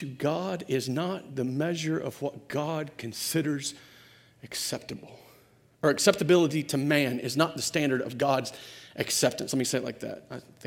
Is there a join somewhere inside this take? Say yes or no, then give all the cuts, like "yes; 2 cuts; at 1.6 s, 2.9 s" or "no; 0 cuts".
no; 0 cuts